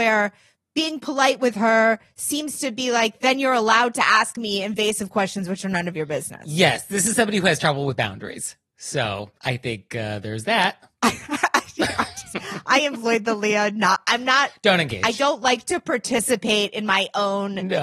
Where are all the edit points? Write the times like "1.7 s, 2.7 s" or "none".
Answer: 9.4 s